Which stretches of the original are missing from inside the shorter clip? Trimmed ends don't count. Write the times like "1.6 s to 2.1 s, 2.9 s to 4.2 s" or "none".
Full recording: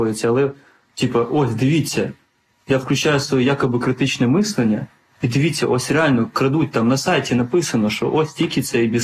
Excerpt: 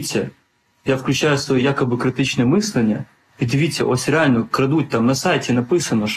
none